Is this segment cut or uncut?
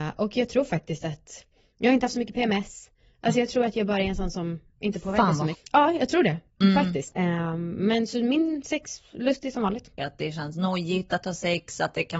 cut